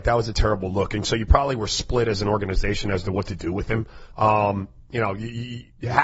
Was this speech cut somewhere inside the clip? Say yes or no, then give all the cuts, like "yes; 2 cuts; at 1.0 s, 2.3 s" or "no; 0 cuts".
no; 0 cuts